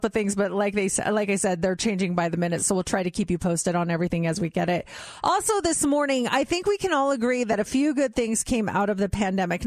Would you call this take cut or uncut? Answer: uncut